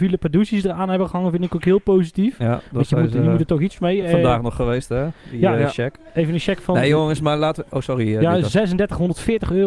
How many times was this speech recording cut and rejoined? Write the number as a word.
zero